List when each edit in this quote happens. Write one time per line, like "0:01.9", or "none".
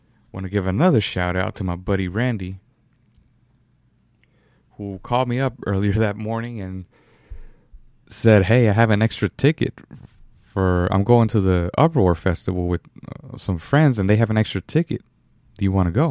none

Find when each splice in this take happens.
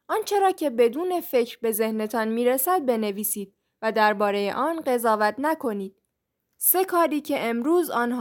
0:06.4

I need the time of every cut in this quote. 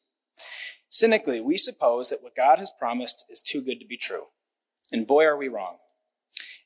none

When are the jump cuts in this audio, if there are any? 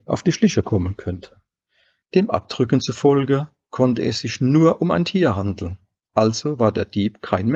0:02.0

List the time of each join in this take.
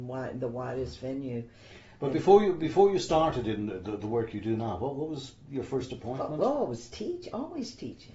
none

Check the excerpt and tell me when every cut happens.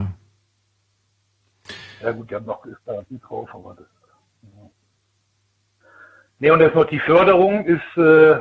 none

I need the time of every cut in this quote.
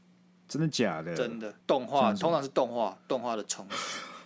0:01.6

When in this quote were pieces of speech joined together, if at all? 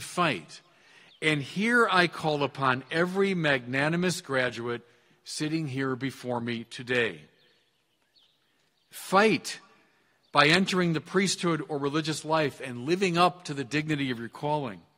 none

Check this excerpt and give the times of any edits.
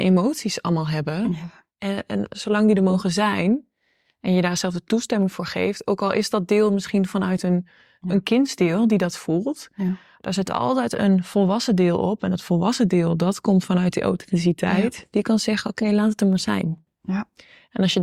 none

